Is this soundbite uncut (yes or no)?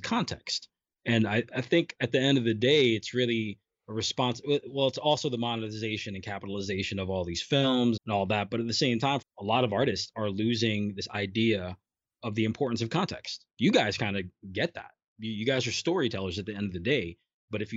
no